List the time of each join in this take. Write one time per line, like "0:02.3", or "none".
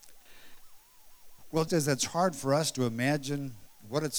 0:01.7